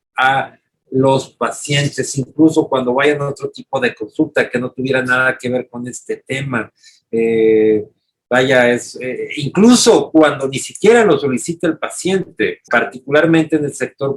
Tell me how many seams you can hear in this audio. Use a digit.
1